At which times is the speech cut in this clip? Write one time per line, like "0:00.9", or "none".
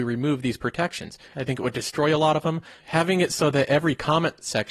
0:01.3
0:02.8